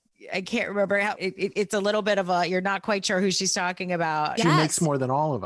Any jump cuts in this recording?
yes; 2 cuts; at 1.2 s, 4.4 s

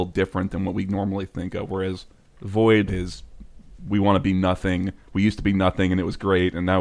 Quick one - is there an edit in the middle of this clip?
yes; 1 cut; at 2.9 s

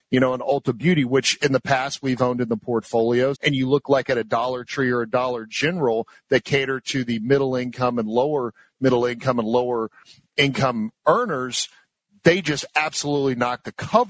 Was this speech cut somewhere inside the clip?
yes; 1 cut; at 3.3 s

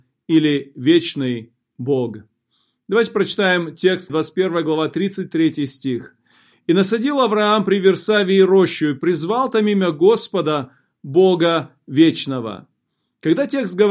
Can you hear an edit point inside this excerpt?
yes; 1 cut; at 4.1 s

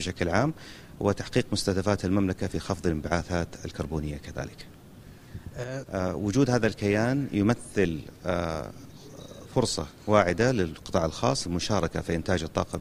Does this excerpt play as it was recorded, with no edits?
no; 1 cut; at 5.9 s

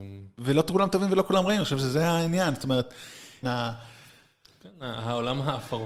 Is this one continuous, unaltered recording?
no; 1 cut; at 3.4 s

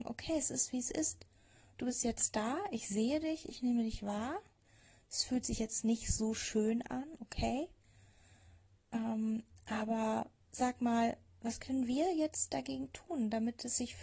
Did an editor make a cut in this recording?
no; 0 cuts

